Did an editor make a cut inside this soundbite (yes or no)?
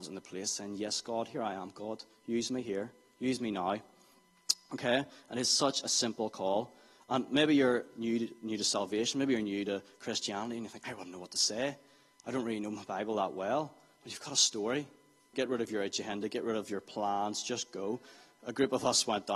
yes